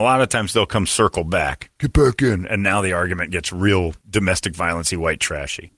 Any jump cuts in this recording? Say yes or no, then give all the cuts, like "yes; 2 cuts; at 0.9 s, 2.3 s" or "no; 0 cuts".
yes; 1 cut; at 4.0 s